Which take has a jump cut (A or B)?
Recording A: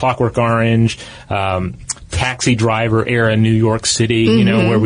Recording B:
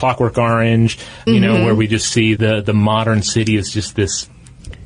B